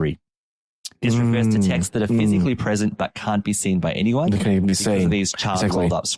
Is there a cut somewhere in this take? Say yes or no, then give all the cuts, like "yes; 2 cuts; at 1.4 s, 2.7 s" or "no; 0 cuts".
no; 0 cuts